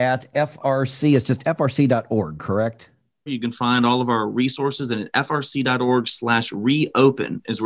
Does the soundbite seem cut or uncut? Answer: cut